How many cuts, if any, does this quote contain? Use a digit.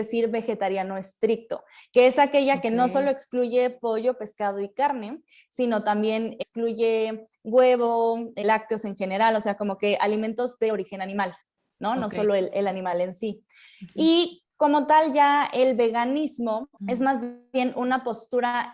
0